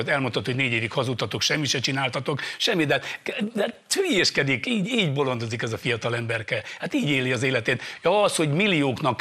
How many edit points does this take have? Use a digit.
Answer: 0